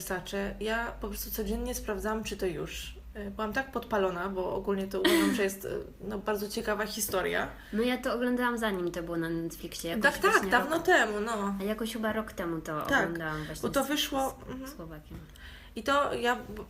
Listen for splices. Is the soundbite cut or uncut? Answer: cut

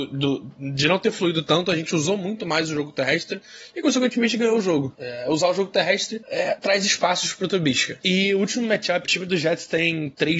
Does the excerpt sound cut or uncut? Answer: cut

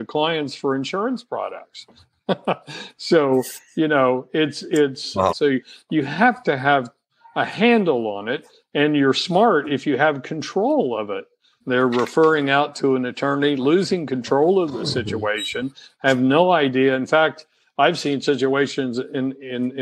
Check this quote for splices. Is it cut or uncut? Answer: cut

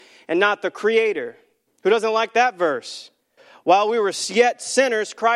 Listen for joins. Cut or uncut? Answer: cut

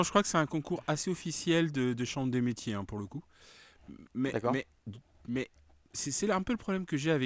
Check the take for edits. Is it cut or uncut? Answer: uncut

